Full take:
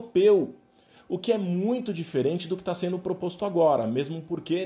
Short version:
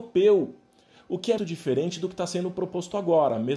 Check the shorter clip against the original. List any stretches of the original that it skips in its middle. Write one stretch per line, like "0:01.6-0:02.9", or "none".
0:01.4-0:01.9